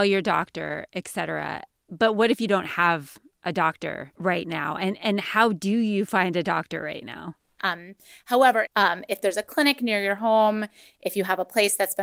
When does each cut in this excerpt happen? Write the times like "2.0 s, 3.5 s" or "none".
7.6 s, 8.7 s

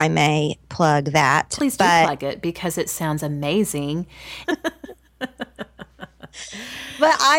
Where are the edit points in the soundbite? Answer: 4.4 s

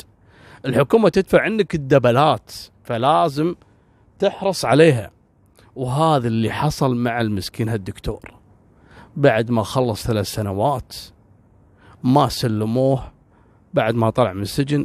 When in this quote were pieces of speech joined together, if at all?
none

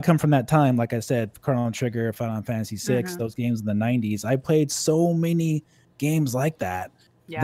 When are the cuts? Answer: none

